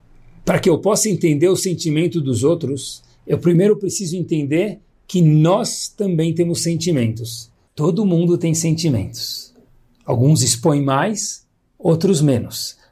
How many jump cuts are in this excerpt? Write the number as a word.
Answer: one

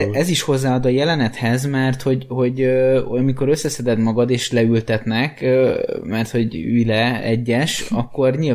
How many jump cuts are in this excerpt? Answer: zero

